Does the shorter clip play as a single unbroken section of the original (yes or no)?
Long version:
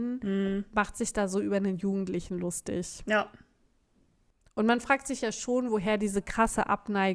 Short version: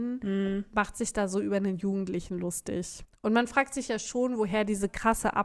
no